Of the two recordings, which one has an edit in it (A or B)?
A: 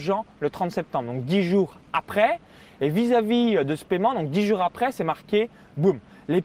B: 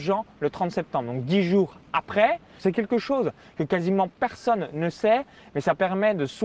B